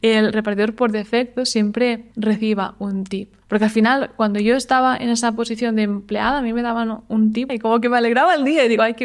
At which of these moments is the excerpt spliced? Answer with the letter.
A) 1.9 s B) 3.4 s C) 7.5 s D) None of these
C